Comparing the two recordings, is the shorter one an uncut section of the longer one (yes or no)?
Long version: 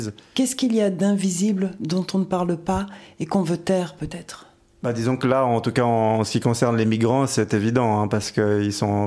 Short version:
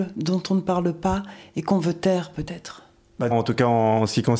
no